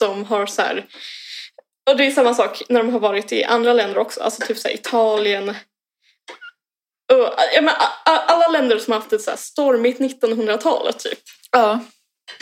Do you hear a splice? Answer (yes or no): no